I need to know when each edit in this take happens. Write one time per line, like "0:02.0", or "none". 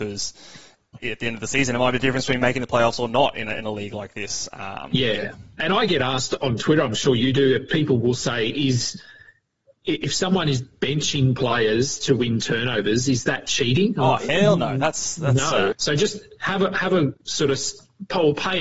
0:15.7
0:17.2